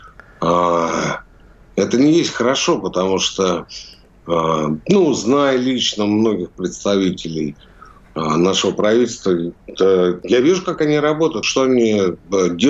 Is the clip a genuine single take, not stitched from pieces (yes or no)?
no